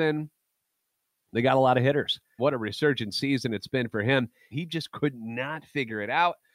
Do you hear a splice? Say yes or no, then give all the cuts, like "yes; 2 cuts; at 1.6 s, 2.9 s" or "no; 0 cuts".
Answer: yes; 2 cuts; at 2.4 s, 4.5 s